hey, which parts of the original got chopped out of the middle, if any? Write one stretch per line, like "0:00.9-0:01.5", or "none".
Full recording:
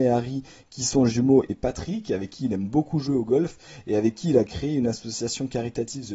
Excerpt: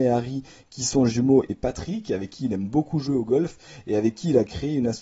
none